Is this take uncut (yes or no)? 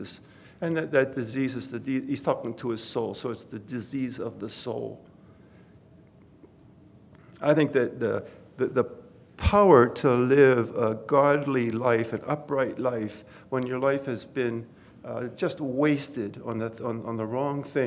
yes